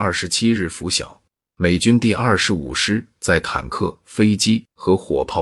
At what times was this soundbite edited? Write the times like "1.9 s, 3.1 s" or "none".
none